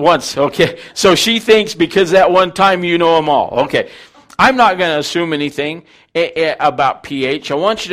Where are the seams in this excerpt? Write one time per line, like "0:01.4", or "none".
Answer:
none